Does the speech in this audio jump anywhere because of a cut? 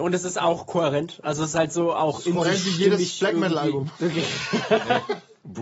no; 0 cuts

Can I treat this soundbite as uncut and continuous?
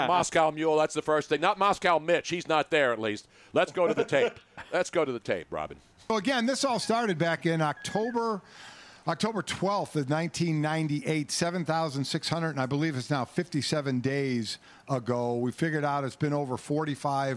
yes; 0 cuts

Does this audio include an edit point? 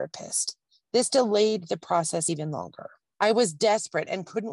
no; 0 cuts

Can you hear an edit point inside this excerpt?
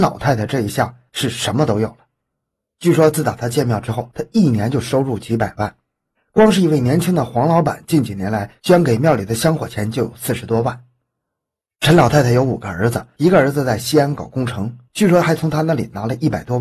no; 0 cuts

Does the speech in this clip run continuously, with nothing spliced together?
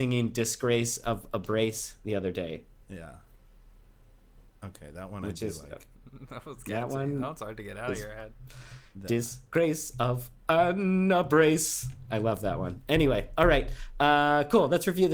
yes; 0 cuts

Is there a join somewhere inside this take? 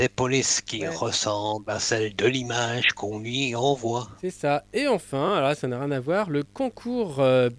no; 0 cuts

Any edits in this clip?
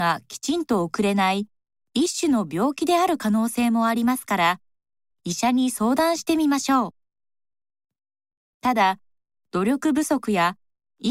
yes; 1 cut; at 5.1 s

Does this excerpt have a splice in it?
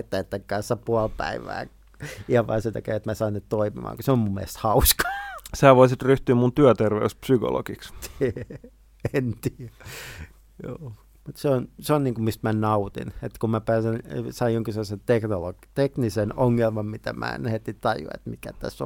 no; 0 cuts

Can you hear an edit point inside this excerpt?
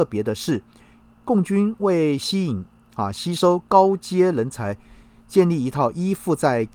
no; 0 cuts

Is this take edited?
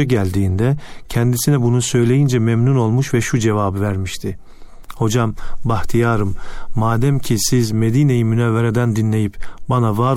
no; 0 cuts

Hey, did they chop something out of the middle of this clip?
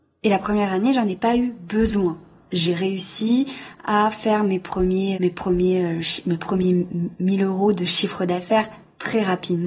yes; 1 cut; at 5.1 s

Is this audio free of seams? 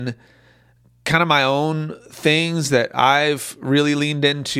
yes; 0 cuts

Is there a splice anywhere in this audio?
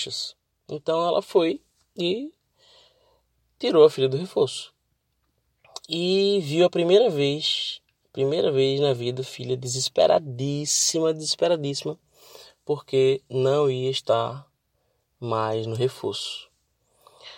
no; 0 cuts

